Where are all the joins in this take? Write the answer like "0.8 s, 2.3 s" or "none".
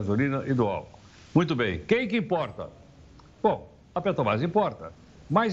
none